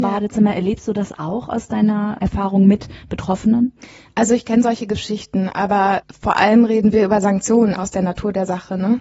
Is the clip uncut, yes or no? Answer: no